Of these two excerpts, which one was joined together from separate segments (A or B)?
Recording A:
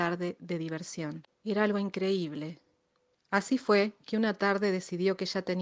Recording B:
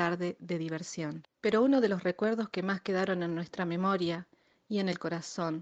A